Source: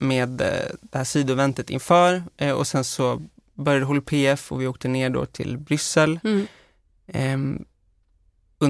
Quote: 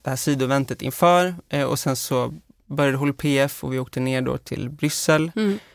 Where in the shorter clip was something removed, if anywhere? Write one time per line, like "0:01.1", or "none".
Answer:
none